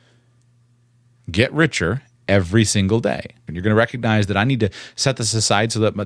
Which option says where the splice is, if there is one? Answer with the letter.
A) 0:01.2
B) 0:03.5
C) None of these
B